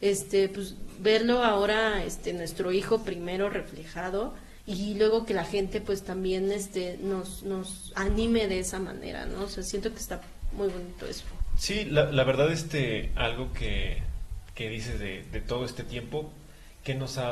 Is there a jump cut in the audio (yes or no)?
no